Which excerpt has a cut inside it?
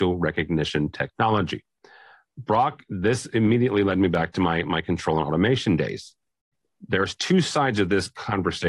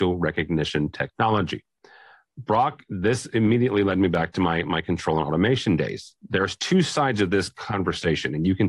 second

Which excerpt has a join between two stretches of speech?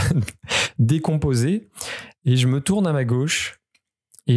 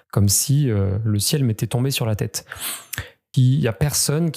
second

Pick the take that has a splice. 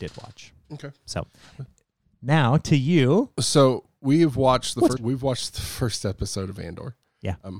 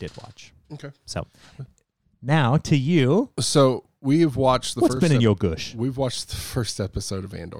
first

